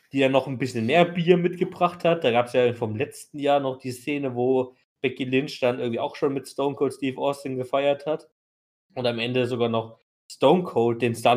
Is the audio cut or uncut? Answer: uncut